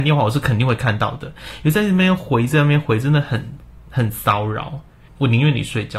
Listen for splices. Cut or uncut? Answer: cut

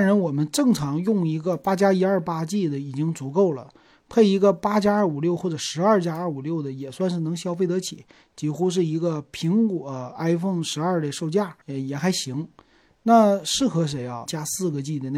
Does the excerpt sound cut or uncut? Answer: cut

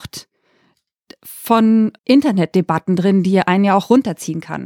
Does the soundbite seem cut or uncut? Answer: cut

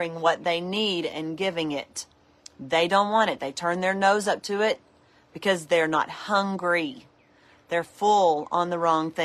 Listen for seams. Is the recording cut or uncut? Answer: uncut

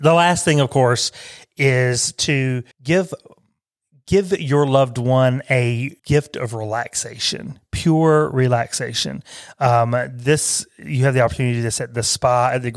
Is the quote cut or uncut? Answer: cut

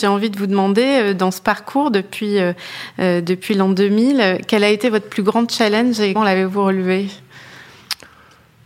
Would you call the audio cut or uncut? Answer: cut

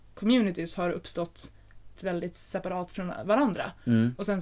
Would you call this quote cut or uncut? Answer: cut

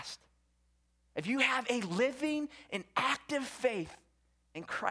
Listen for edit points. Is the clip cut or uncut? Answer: uncut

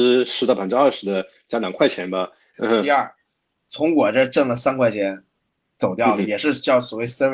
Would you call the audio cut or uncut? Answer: cut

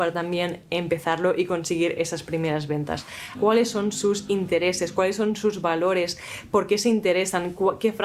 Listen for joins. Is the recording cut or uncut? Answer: cut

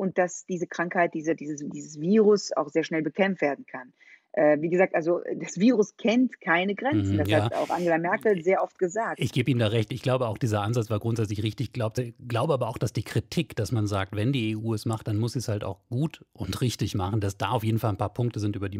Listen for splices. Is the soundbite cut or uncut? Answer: uncut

